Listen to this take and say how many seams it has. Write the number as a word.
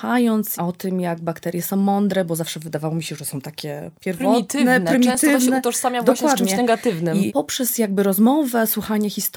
zero